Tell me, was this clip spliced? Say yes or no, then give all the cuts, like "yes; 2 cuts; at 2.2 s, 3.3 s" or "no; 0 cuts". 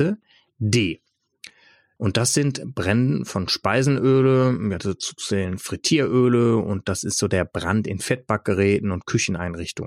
yes; 1 cut; at 2.0 s